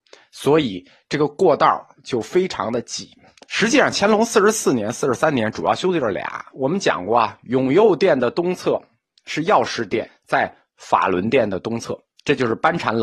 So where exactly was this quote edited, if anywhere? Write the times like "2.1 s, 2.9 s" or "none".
6.5 s, 10.1 s

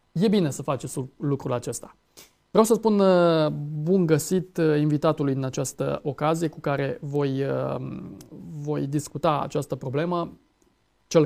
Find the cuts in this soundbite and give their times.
none

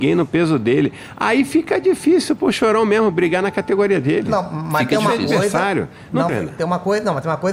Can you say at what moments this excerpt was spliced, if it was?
6.3 s

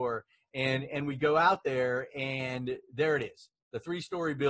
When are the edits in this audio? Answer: none

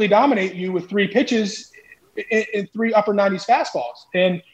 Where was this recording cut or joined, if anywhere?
none

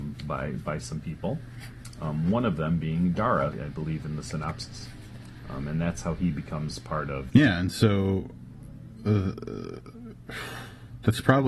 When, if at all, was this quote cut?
3.5 s, 7.3 s

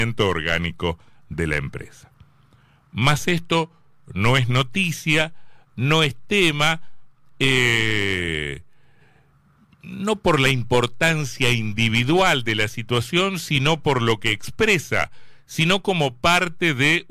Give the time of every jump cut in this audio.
none

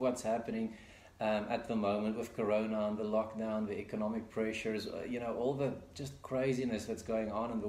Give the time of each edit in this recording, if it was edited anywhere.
none

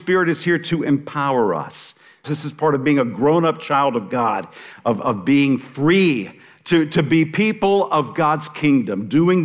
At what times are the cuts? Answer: 2.2 s

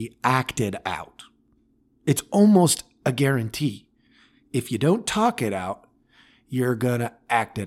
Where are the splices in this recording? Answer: none

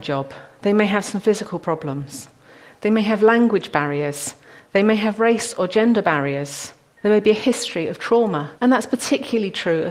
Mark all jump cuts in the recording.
7.0 s, 8.6 s

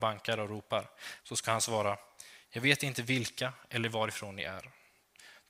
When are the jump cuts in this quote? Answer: 1.2 s

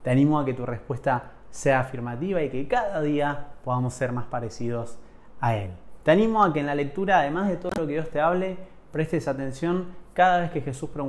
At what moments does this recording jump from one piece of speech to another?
6.0 s

